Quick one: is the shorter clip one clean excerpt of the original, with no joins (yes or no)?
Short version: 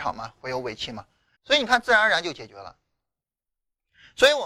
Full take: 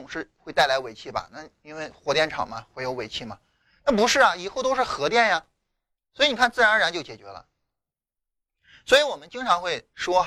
no